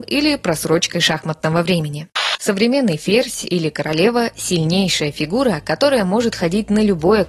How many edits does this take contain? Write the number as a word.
one